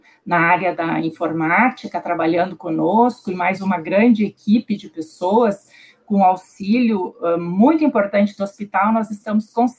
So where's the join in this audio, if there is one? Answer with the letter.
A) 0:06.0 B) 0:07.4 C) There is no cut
C